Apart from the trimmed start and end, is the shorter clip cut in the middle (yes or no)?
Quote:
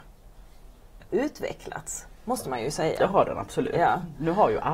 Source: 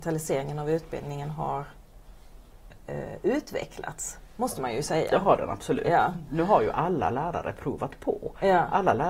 yes